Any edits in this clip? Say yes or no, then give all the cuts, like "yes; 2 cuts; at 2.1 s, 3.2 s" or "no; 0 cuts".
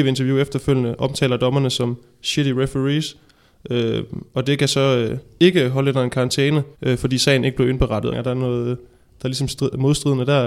yes; 2 cuts; at 6.7 s, 8.1 s